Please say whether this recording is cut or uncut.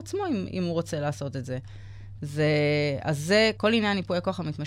cut